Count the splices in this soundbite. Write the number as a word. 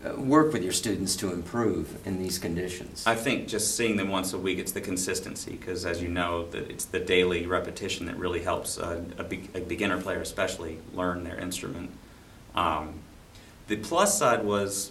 zero